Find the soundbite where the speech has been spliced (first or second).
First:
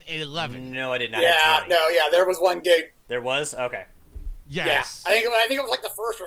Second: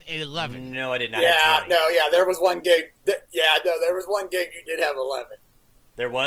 first